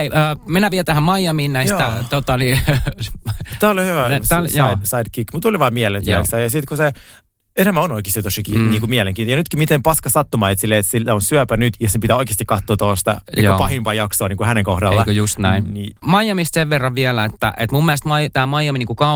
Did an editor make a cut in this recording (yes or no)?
no